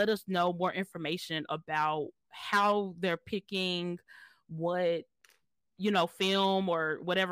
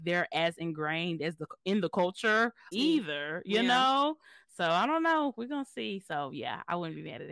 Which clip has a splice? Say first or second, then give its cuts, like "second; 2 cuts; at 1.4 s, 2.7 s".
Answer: second; 1 cut; at 2.7 s